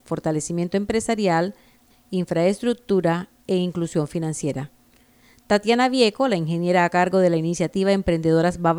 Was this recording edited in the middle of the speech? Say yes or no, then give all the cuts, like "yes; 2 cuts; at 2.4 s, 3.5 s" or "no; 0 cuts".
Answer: yes; 1 cut; at 1.9 s